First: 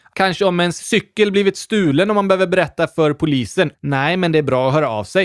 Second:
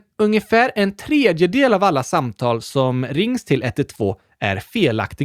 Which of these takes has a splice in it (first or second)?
first